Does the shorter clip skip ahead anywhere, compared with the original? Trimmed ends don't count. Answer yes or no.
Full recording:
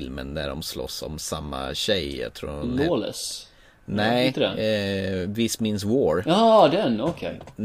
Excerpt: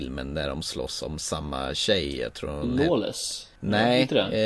yes